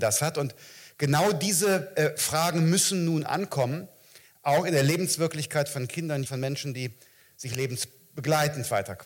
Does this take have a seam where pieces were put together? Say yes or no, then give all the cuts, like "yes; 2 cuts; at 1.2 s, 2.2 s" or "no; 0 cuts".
yes; 1 cut; at 6.2 s